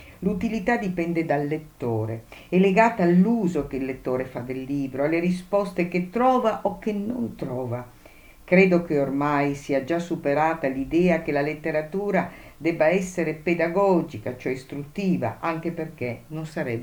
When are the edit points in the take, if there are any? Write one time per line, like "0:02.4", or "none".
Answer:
none